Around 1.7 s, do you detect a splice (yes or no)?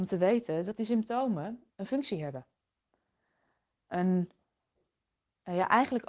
yes